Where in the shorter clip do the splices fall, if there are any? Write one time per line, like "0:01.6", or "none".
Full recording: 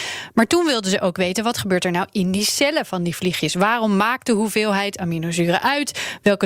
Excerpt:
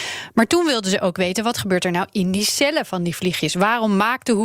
none